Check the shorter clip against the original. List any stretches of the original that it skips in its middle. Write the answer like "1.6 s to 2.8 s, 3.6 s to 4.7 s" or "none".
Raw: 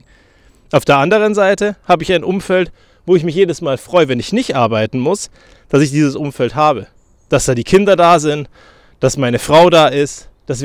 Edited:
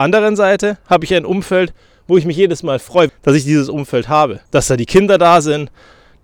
4.1 s to 5.6 s, 6.9 s to 7.2 s